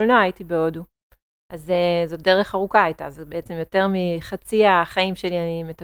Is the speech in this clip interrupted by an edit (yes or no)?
yes